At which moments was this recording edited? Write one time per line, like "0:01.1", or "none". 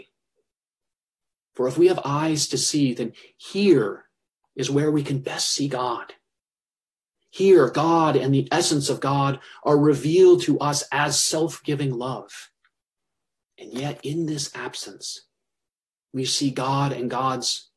0:13.4